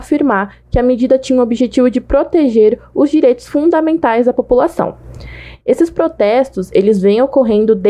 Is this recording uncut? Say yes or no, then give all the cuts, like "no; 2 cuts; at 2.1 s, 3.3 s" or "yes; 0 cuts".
yes; 0 cuts